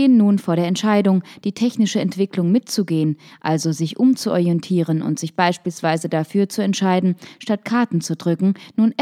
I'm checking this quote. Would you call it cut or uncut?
uncut